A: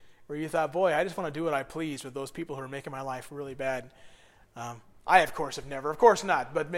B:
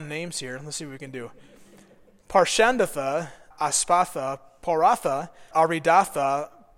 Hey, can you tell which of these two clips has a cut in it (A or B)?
B